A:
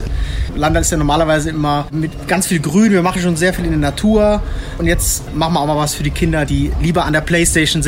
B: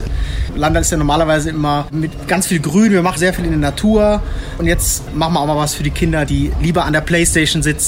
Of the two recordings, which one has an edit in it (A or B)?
B